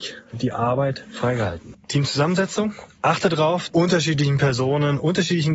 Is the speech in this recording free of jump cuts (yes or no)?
no